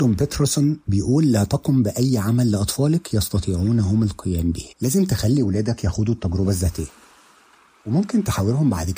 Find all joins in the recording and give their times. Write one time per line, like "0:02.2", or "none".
0:04.7